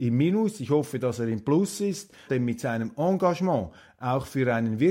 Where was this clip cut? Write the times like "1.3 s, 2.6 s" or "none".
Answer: 2.3 s